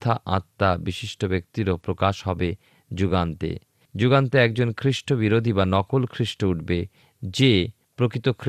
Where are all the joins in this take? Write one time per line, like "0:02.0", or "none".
none